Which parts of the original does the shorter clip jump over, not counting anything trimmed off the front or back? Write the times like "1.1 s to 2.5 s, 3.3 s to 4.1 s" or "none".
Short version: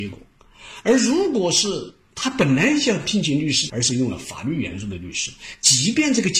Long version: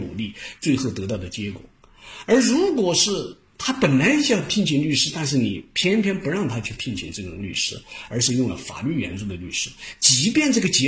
5.1 s to 8.1 s

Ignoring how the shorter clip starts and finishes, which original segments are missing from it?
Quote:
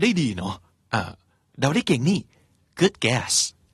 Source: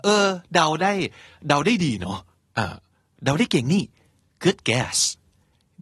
none

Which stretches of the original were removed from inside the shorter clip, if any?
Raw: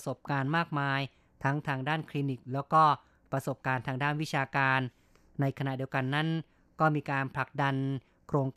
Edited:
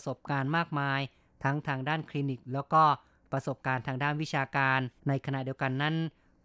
5.0 s to 5.3 s

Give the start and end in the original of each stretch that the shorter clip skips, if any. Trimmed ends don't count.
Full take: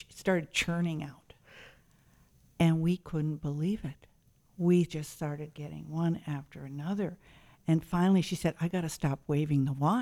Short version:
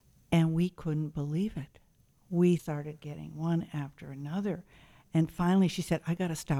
4.9 s to 5.1 s

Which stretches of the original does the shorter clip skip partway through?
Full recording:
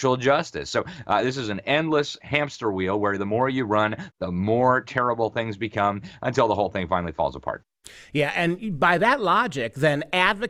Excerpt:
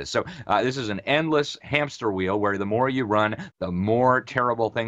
none

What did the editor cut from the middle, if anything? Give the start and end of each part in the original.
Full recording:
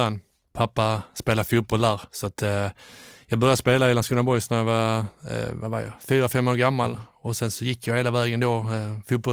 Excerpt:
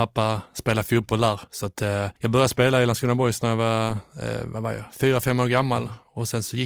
2.8 s to 3.2 s

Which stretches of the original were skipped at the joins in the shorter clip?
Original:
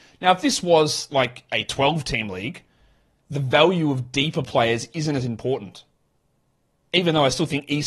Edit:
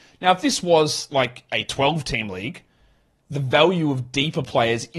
none

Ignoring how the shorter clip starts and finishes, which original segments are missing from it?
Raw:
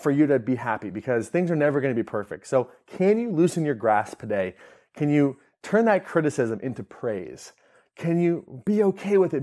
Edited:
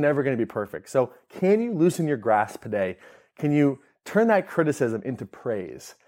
none

